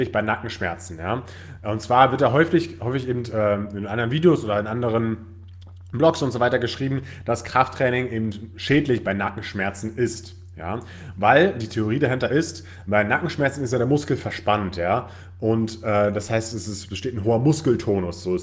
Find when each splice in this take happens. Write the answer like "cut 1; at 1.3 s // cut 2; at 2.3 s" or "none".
none